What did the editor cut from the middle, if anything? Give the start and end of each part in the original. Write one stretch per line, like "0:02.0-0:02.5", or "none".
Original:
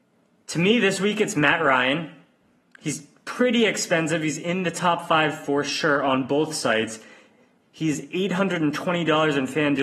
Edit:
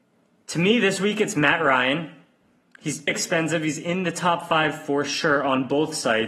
0:03.1-0:03.7